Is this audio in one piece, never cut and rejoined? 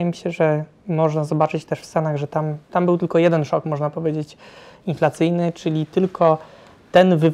yes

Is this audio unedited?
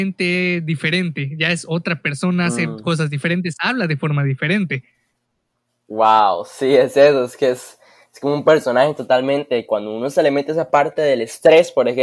yes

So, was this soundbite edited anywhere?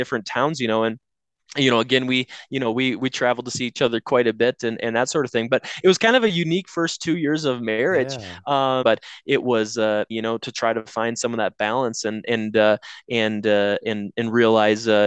yes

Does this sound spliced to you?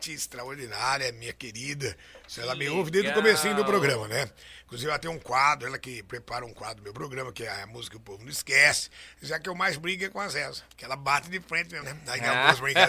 yes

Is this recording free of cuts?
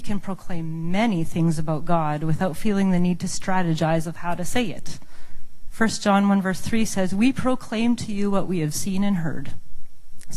no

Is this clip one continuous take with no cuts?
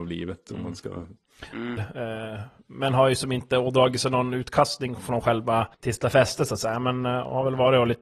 no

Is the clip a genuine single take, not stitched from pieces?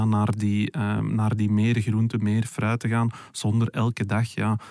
yes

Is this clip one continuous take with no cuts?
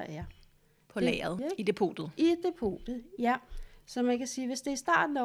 no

